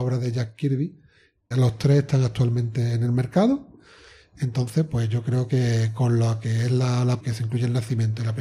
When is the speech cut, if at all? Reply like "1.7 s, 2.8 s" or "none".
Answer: 1.5 s, 7.2 s